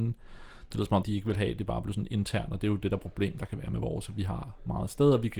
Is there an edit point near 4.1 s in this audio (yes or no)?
no